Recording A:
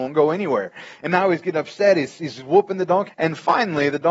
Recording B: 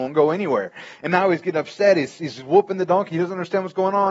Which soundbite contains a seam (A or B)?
A